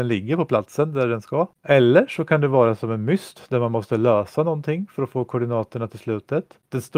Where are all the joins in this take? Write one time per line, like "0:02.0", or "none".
none

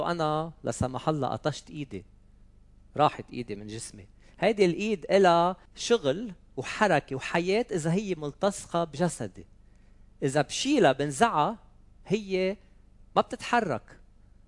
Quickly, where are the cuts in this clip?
0:05.7

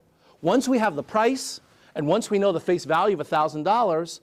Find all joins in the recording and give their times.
none

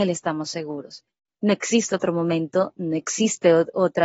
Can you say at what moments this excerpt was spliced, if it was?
0:01.3

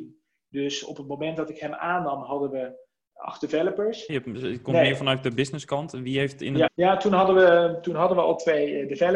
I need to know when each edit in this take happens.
0:04.1
0:06.7

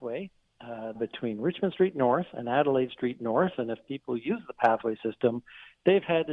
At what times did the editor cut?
0:00.9

